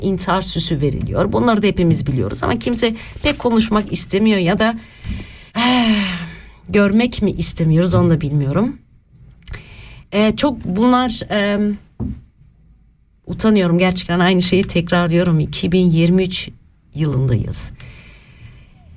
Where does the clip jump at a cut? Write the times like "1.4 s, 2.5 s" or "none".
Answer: 5.5 s